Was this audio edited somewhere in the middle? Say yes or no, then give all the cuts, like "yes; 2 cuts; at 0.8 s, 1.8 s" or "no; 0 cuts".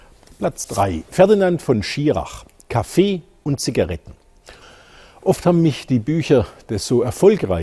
yes; 1 cut; at 1.1 s